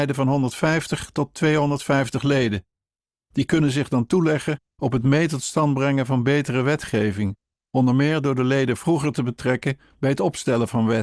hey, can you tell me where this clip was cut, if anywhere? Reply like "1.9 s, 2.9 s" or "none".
none